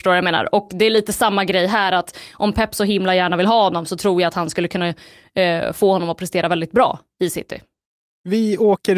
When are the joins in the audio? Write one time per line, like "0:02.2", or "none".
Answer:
none